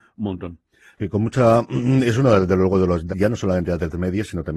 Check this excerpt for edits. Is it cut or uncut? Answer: cut